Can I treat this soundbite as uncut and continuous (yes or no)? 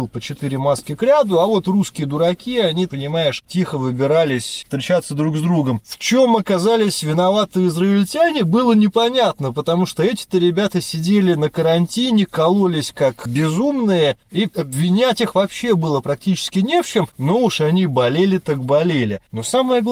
no